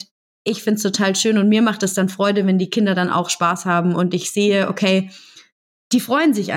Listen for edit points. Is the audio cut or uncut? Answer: uncut